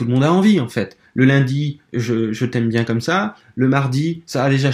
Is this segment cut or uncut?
uncut